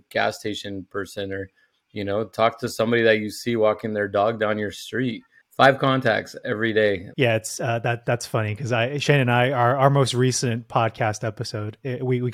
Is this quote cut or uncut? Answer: cut